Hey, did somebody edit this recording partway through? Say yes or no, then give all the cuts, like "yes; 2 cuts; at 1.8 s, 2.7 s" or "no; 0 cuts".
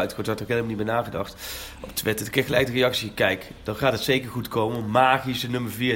no; 0 cuts